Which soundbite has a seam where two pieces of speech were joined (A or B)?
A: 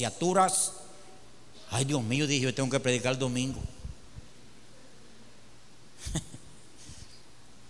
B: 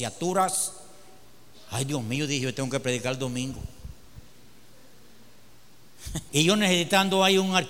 B